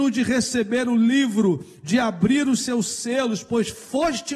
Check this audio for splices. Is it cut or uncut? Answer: uncut